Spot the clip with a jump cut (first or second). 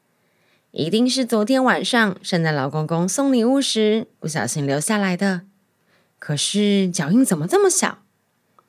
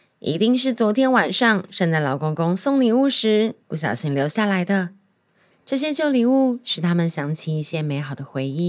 second